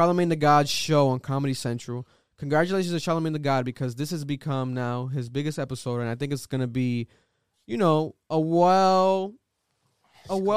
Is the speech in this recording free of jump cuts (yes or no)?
yes